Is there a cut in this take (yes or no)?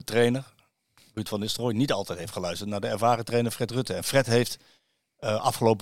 no